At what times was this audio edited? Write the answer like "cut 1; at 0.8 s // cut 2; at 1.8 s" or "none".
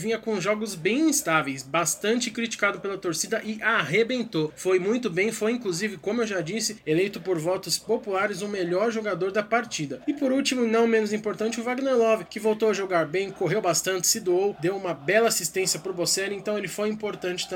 none